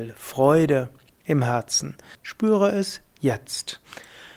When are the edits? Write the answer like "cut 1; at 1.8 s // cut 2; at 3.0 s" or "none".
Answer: cut 1; at 2.1 s